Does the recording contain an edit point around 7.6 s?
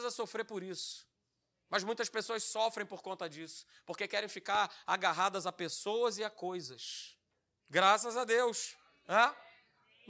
yes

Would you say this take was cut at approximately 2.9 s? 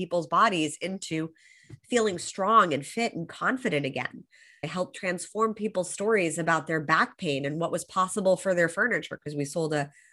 no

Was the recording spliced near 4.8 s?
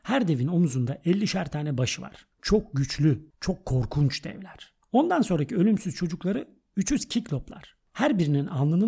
no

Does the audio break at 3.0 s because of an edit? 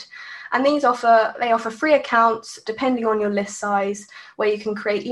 no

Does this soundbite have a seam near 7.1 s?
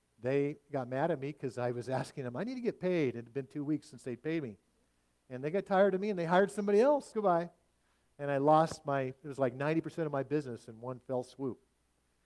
yes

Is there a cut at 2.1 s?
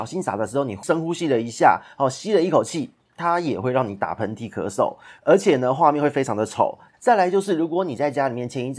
no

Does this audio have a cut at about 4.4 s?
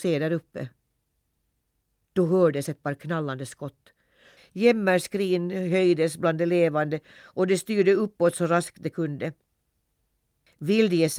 yes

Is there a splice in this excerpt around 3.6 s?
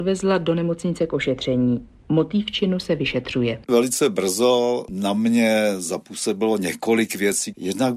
yes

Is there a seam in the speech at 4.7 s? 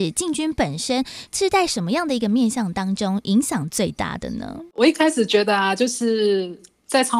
no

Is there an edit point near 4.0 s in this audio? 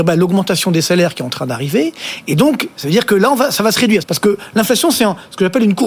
yes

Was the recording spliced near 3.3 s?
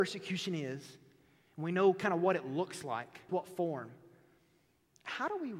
yes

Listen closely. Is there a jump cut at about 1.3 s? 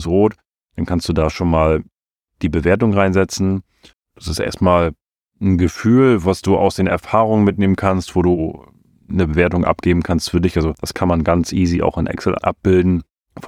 no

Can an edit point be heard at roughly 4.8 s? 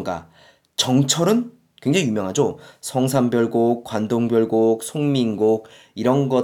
yes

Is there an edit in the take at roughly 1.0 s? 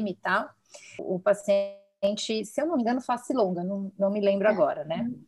yes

